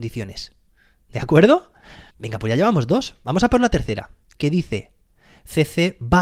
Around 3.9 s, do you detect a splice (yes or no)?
no